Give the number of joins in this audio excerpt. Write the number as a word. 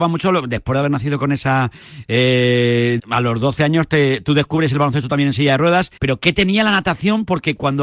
two